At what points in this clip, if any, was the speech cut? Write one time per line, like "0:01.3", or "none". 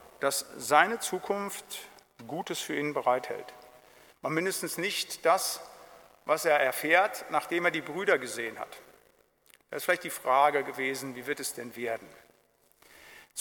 0:04.1
0:09.6